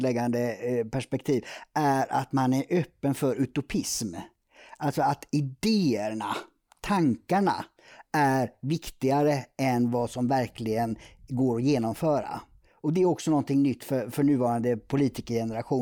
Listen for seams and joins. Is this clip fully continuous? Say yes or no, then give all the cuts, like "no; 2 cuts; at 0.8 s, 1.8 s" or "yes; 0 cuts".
yes; 0 cuts